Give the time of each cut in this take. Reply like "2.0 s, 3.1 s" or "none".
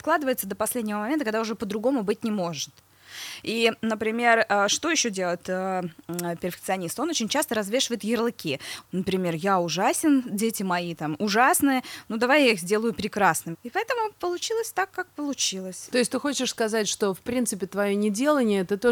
8.8 s, 13.5 s, 15.9 s